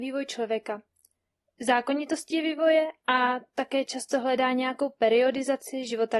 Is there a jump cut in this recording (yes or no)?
no